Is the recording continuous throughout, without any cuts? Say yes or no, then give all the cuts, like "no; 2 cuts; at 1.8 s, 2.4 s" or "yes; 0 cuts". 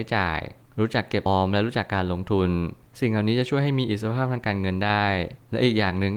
no; 1 cut; at 1.3 s